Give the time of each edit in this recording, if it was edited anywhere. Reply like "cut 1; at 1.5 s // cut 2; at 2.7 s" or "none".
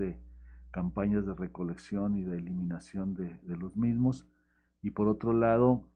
none